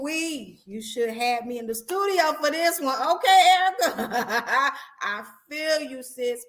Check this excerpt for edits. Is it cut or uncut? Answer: uncut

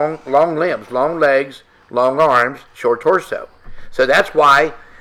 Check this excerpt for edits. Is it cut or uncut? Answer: uncut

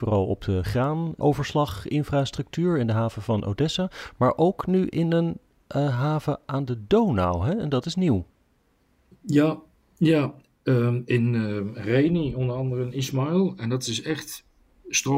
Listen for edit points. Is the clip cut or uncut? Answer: uncut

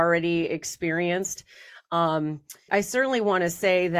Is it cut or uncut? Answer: cut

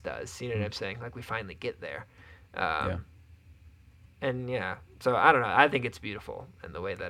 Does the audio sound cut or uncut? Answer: uncut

